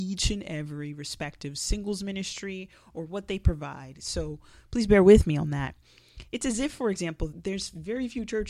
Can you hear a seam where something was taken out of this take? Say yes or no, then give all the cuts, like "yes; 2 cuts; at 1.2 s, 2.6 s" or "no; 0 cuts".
yes; 1 cut; at 7.3 s